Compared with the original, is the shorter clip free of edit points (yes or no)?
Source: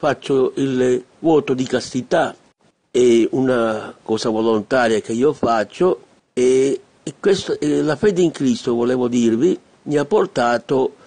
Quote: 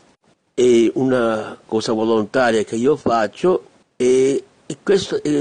yes